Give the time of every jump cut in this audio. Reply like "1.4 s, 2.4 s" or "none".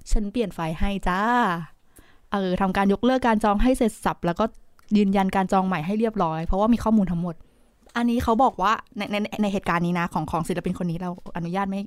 none